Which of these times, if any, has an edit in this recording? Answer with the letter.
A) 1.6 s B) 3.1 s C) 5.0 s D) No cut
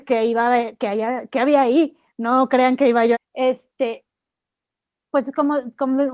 B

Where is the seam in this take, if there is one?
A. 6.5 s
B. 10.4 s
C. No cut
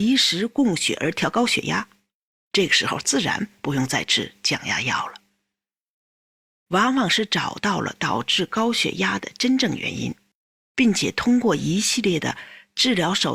A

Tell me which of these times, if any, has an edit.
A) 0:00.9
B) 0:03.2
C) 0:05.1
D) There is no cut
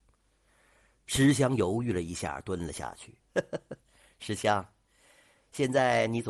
B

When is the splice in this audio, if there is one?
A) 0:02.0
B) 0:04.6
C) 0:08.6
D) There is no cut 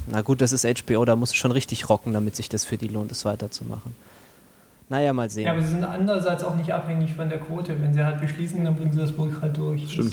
C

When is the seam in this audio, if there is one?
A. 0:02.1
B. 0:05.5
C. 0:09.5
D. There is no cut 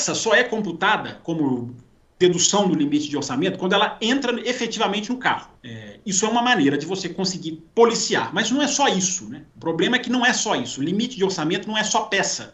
B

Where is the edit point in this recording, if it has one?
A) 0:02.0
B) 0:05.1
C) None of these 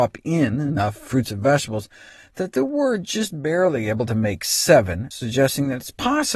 B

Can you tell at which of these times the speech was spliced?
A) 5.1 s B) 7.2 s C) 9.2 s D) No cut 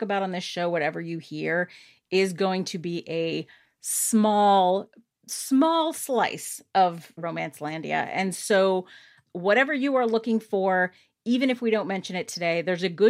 B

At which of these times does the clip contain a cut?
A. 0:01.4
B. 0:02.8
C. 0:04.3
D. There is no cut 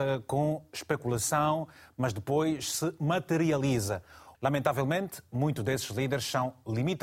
C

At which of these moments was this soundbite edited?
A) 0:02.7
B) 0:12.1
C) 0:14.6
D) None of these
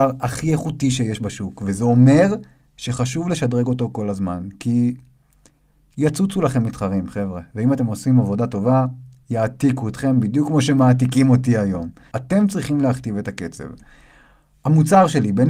B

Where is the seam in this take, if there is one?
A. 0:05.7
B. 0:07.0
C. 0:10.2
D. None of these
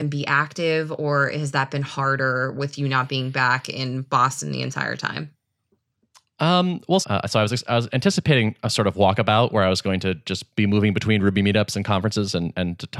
B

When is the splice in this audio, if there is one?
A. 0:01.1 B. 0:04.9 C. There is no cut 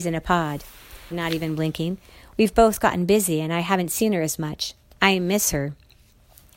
A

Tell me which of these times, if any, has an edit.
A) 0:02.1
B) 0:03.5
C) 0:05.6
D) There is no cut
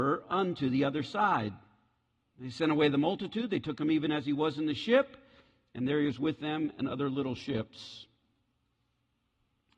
D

